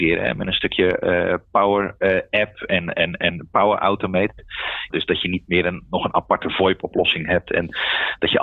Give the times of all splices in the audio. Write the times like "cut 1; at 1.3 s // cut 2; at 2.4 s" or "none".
cut 1; at 4.9 s